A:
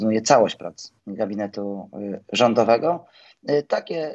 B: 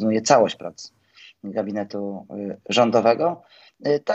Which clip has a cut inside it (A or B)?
A